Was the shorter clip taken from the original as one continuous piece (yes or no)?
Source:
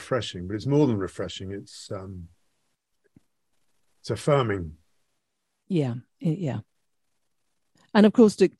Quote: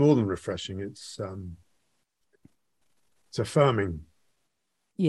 yes